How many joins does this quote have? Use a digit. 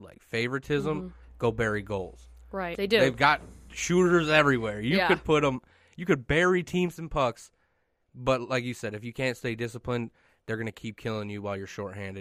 1